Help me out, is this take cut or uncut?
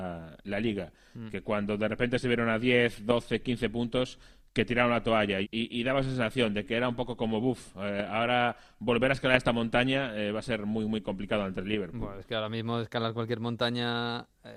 cut